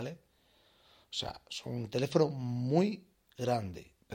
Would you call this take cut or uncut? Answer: uncut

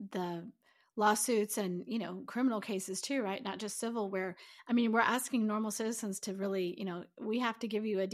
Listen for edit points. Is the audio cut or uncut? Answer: uncut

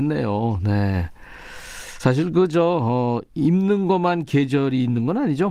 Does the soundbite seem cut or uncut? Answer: uncut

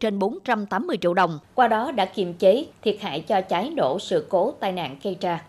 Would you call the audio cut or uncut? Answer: cut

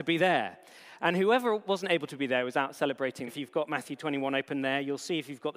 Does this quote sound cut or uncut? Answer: cut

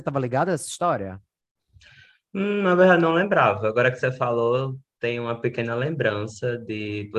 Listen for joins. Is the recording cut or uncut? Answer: uncut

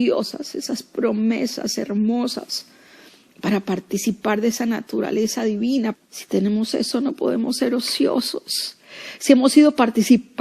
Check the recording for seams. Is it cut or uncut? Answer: cut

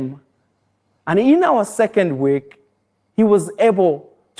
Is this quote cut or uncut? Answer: cut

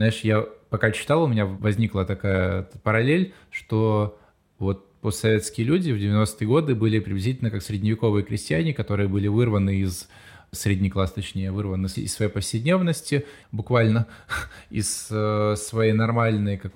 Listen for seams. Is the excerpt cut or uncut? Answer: cut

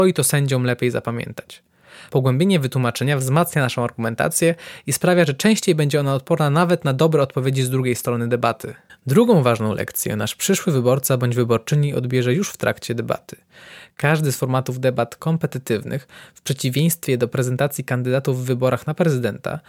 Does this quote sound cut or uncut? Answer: uncut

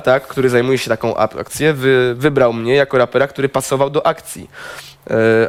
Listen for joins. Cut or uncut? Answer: uncut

